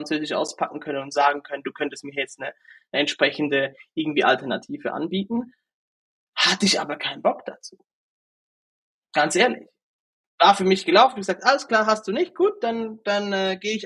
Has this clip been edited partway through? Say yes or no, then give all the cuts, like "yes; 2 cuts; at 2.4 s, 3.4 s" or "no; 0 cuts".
no; 0 cuts